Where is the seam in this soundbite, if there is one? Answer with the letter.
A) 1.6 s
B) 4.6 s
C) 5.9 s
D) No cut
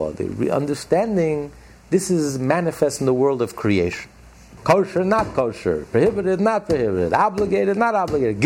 B